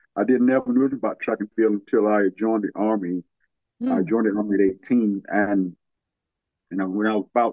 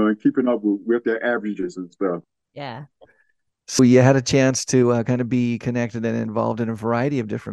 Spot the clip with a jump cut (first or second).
second